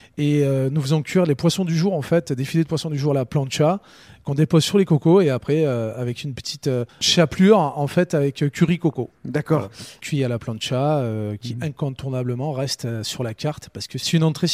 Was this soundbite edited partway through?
yes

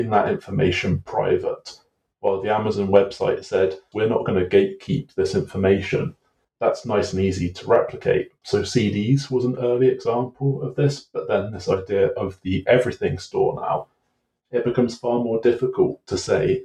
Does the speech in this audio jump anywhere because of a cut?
yes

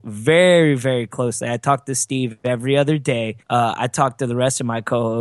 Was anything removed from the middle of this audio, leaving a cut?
yes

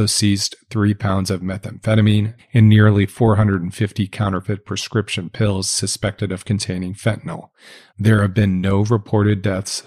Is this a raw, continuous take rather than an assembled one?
no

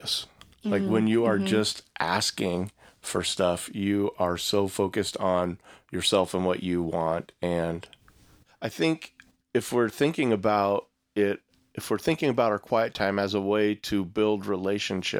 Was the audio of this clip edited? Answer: no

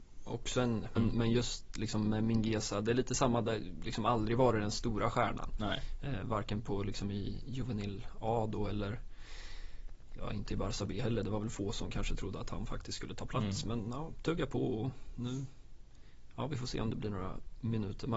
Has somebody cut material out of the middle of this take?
yes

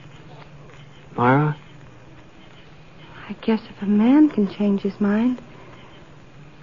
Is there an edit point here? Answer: no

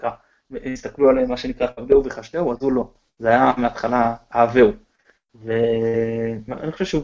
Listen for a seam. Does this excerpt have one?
no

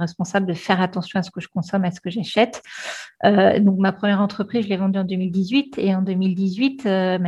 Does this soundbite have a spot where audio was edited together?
no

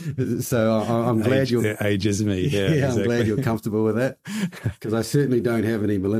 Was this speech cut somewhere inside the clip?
no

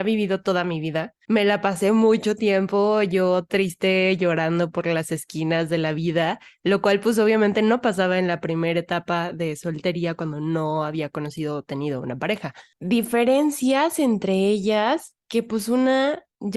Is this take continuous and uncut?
no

